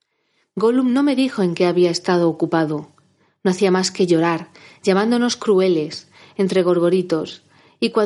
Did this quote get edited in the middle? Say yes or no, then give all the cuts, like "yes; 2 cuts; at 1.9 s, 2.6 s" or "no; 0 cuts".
no; 0 cuts